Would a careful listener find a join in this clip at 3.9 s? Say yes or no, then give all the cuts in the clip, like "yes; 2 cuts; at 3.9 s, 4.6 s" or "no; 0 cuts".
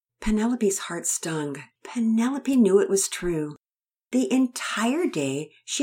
no; 1 cut; at 1.7 s